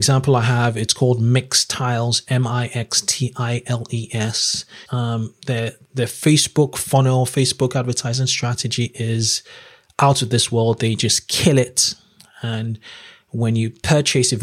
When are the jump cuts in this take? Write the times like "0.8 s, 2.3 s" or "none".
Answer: 4.9 s